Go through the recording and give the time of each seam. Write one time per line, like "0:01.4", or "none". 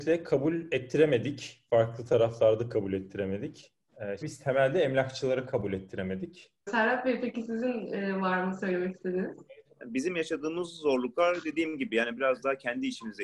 0:04.2
0:06.7
0:09.7